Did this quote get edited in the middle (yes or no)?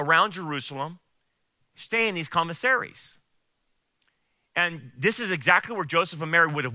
no